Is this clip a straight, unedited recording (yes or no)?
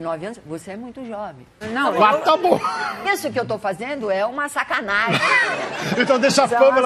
no